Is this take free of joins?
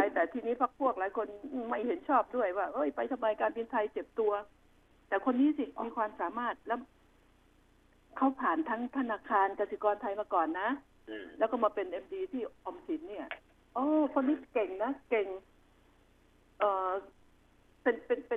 yes; 0 cuts

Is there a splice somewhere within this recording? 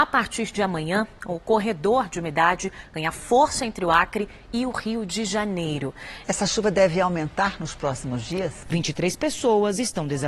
yes; 2 cuts; at 6.2 s, 8.6 s

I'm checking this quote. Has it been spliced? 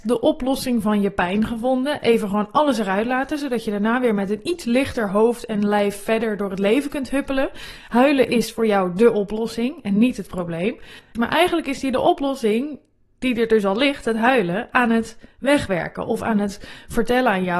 yes; 1 cut; at 11.2 s

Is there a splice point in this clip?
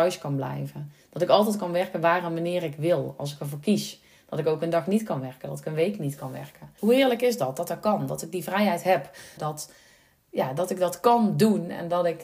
yes; 2 cuts; at 6.8 s, 9.4 s

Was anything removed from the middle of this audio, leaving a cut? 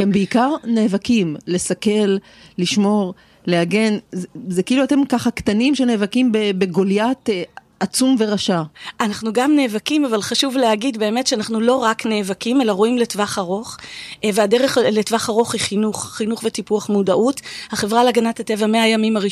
no; 0 cuts

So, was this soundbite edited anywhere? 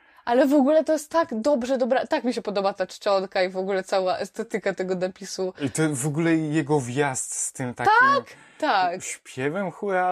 no; 0 cuts

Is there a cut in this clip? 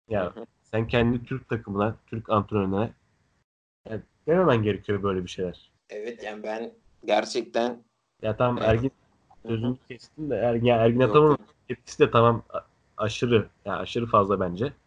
yes; 1 cut; at 5.8 s

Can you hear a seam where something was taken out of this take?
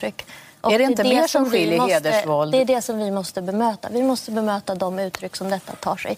no; 0 cuts

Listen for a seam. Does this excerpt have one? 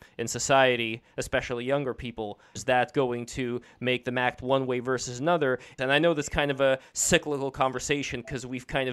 yes; 2 cuts; at 2.6 s, 5.8 s

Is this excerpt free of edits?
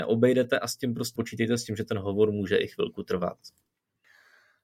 no; 1 cut; at 1.2 s

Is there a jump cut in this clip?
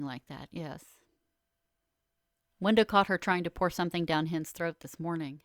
yes; 1 cut; at 2.4 s

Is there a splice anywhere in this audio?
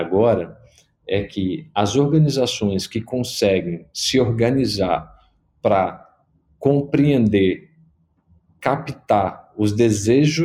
no; 0 cuts

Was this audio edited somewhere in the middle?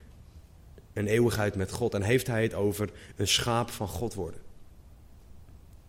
no; 0 cuts

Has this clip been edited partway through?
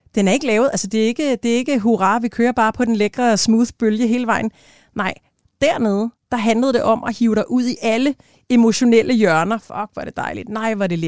no; 0 cuts

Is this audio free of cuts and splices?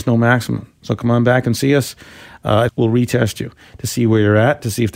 no; 1 cut; at 2.7 s

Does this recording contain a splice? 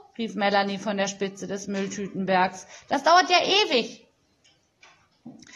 no; 0 cuts

